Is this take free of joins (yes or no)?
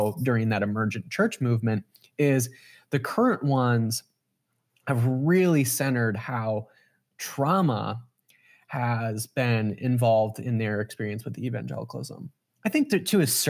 yes